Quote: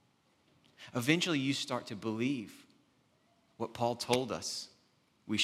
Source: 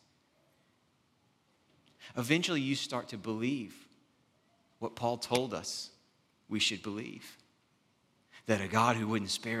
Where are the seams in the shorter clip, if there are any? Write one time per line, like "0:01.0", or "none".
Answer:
none